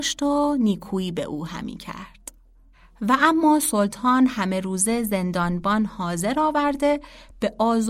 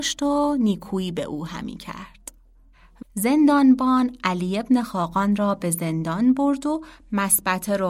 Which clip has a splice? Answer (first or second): second